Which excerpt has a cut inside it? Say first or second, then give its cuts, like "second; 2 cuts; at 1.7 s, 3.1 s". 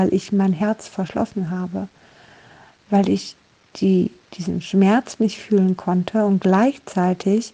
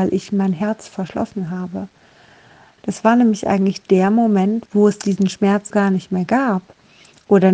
second; 3 cuts; at 2.8 s, 4.7 s, 5.7 s